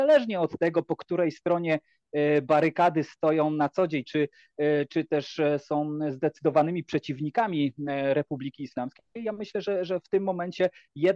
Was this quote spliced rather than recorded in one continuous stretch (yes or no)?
yes